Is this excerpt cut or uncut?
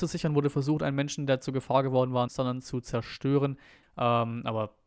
cut